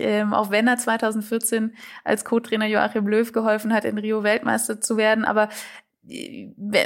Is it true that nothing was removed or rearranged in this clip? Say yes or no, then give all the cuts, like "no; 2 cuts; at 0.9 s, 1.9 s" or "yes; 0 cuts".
yes; 0 cuts